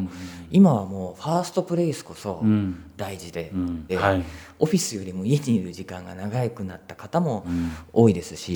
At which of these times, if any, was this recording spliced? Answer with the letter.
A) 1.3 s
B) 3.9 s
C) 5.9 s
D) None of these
B